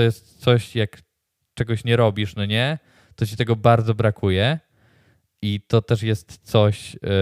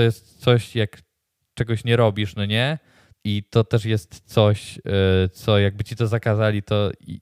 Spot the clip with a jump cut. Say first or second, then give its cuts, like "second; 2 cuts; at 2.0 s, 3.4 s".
second; 1 cut; at 3.1 s